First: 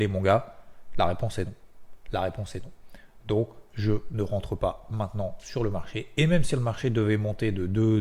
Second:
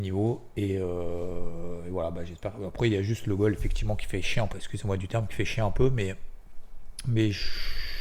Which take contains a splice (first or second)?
second